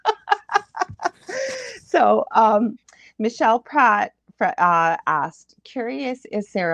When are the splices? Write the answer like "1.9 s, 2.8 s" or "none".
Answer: none